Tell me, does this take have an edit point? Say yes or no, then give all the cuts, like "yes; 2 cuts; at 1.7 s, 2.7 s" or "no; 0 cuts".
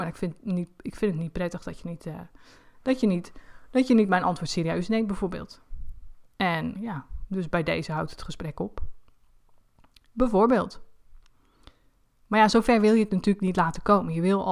yes; 1 cut; at 6.7 s